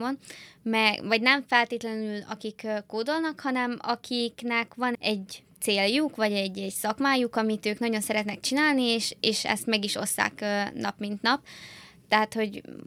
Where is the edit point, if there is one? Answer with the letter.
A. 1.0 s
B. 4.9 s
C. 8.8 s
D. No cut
B